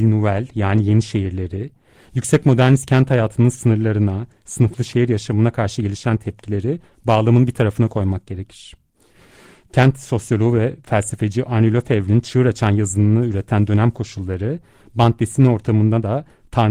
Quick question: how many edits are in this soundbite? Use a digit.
0